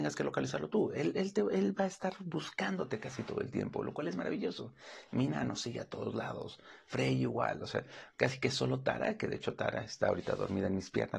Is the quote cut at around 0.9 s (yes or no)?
no